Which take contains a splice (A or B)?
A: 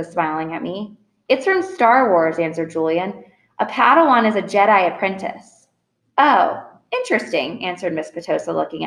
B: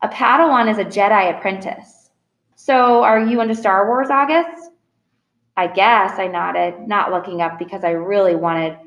B